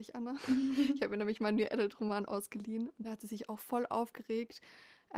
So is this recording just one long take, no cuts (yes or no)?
yes